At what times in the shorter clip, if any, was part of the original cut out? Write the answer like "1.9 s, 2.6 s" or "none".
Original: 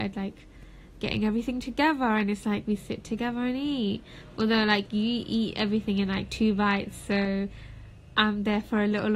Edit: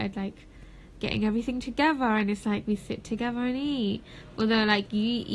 none